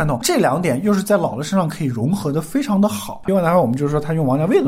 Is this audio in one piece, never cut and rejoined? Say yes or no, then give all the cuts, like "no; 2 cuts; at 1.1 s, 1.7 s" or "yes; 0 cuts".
no; 1 cut; at 3.2 s